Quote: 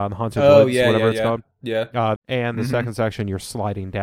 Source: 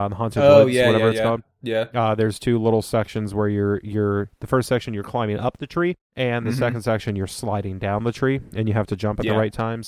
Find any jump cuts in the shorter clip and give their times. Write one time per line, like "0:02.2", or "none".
0:02.2